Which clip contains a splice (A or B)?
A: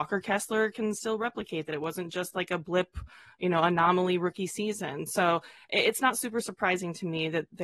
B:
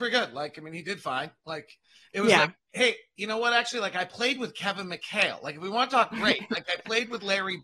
B